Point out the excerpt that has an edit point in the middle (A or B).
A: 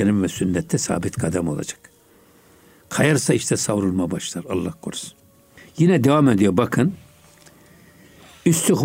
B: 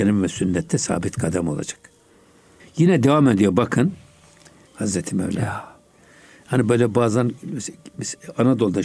B